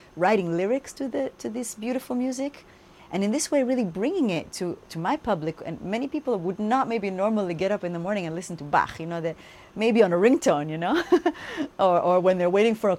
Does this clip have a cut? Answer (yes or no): no